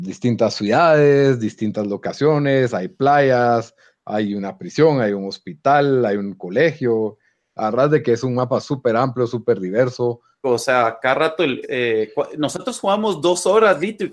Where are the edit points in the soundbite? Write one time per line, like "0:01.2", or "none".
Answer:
0:10.4
0:11.6